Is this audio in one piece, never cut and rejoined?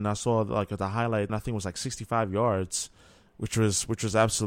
no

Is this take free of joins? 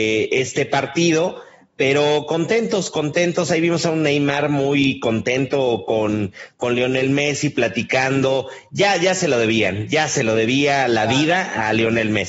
yes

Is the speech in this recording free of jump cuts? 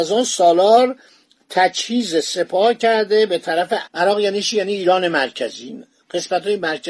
no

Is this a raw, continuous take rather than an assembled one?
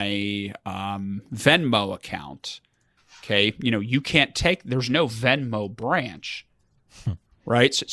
yes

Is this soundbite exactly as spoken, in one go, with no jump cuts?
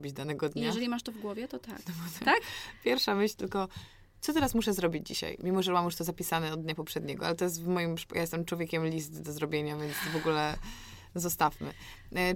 no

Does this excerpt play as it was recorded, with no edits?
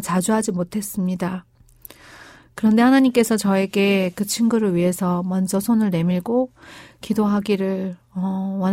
yes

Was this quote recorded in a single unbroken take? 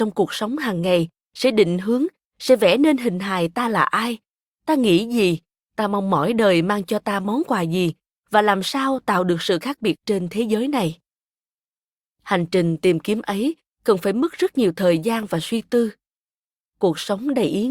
yes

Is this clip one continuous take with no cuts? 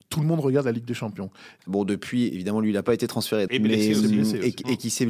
no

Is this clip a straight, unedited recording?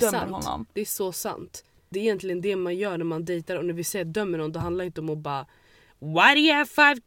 no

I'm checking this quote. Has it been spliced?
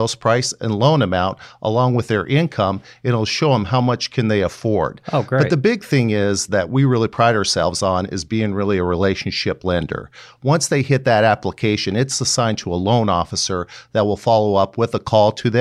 no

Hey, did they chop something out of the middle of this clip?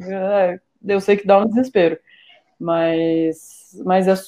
no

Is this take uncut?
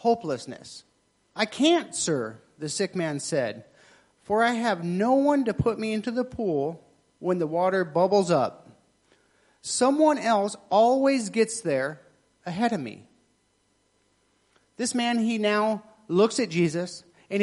no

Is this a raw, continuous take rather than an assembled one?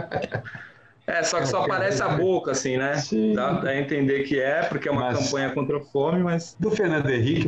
yes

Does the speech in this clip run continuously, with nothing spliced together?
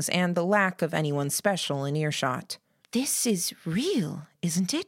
no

